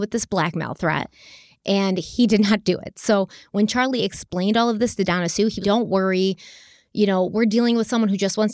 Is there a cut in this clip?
yes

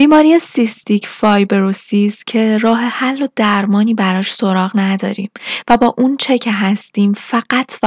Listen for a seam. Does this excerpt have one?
no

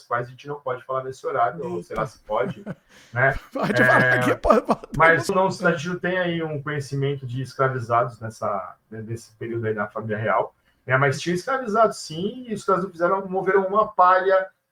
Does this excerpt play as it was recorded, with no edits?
no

